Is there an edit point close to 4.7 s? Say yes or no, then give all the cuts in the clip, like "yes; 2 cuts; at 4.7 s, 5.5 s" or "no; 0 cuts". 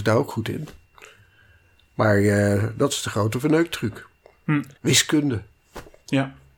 yes; 1 cut; at 4.7 s